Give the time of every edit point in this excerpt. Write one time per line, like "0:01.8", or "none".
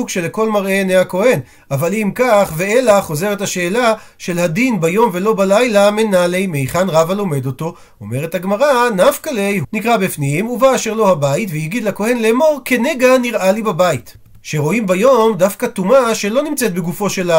0:09.6
0:14.3